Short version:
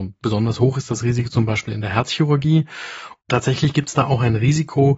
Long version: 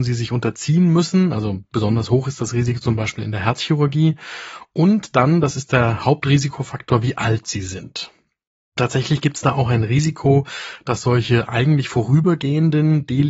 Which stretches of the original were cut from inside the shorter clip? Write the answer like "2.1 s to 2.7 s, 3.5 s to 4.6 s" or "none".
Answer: 4.7 s to 8.7 s